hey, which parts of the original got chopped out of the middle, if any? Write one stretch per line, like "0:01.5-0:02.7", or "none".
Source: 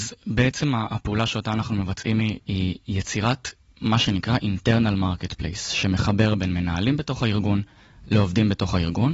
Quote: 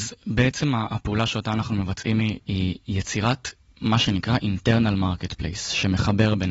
none